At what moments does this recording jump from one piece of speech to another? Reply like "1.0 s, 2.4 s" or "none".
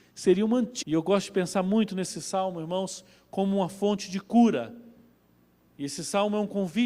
none